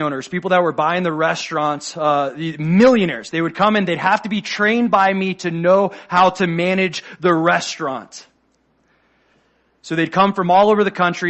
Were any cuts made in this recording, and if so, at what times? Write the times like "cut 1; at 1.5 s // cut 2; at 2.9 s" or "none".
none